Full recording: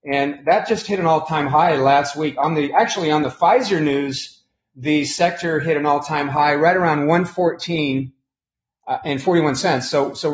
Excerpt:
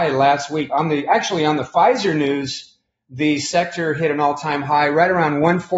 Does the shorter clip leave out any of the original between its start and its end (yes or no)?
no